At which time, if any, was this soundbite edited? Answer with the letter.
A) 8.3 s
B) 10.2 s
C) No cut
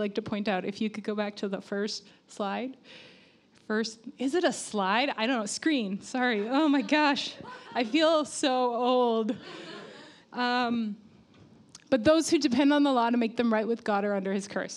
B